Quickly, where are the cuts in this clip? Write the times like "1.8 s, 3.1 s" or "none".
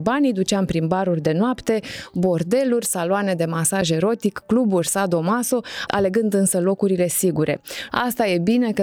5.9 s, 7.9 s